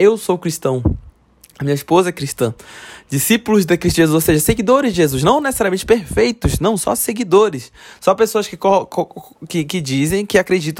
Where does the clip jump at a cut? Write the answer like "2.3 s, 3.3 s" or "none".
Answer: none